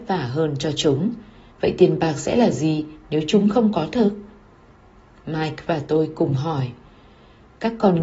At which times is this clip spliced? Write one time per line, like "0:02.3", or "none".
0:01.5